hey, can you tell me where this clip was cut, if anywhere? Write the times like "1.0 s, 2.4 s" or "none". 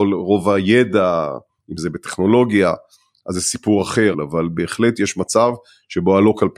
4.1 s